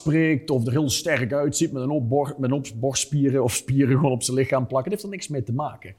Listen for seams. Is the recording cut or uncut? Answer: uncut